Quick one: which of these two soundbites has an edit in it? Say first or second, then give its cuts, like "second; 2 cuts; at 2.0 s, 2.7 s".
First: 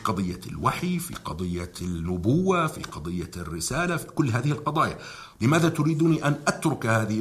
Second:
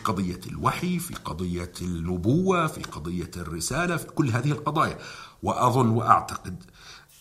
first; 1 cut; at 5.3 s